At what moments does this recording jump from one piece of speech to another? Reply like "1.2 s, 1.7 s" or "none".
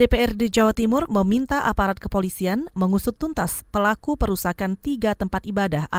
1.1 s